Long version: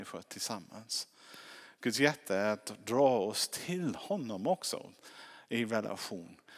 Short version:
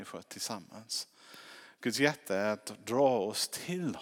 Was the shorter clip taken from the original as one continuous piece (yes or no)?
yes